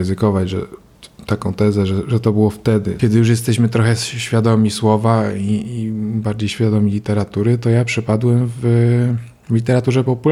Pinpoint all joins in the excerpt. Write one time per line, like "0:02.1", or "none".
0:03.0